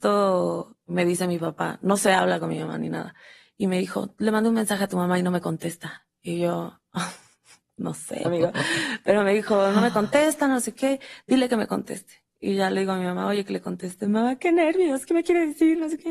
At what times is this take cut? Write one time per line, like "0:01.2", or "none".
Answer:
0:08.2